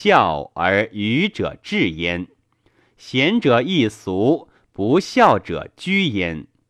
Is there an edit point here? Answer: no; 0 cuts

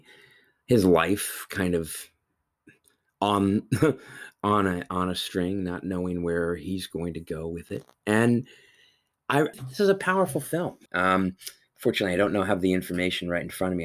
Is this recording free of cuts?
no; 2 cuts; at 9.5 s, 10.9 s

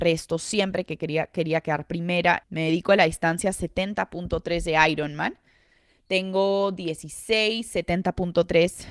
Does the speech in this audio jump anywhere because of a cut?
yes; 1 cut; at 2.4 s

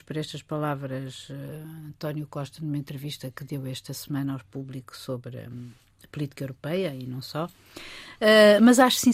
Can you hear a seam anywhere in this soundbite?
no; 0 cuts

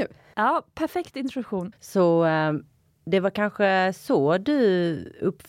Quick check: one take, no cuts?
no; 1 cut; at 1.7 s

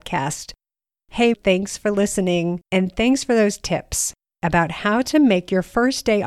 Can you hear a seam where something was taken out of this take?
yes; 2 cuts; at 1.3 s, 2.7 s

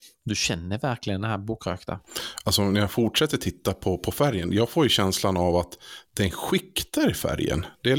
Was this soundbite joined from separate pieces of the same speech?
no; 0 cuts

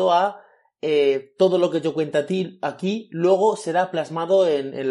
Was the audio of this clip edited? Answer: no; 0 cuts

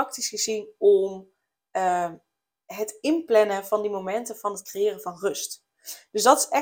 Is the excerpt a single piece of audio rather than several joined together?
yes; 0 cuts

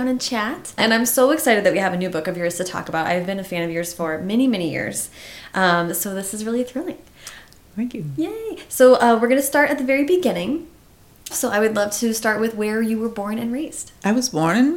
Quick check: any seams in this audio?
yes; 1 cut; at 11.3 s

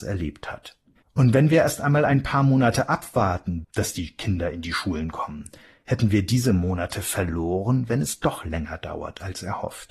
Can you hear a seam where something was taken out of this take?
yes; 2 cuts; at 1.0 s, 3.6 s

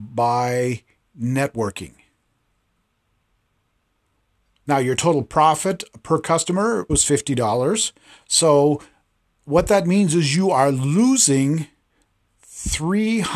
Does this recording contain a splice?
yes; 1 cut; at 6.9 s

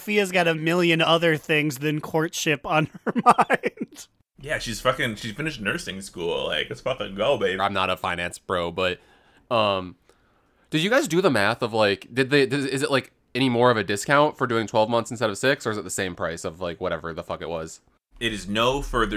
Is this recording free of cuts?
no; 1 cut; at 7.6 s

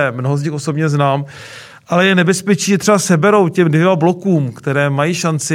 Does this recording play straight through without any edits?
yes; 0 cuts

